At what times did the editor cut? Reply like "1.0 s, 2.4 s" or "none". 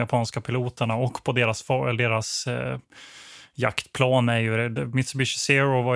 none